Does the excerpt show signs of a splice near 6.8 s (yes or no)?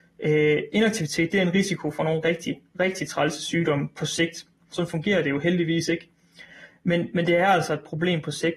no